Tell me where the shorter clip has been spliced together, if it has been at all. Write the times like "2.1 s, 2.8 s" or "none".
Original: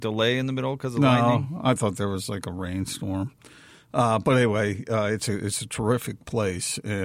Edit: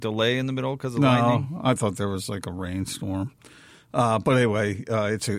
none